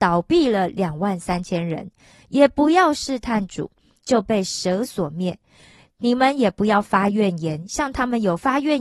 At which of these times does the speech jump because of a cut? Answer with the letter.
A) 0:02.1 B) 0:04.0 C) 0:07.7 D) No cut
B